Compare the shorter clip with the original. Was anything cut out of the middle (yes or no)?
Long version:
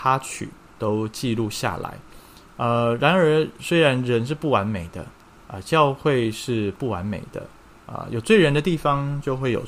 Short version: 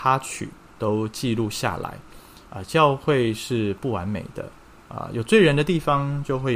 yes